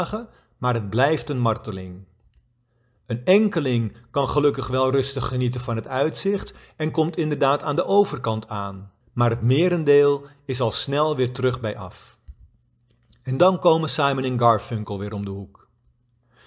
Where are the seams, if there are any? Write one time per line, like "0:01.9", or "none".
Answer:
0:09.0